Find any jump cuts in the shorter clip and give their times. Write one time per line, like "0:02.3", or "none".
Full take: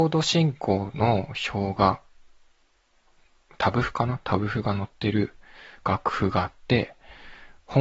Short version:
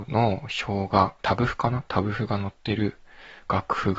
0:01.2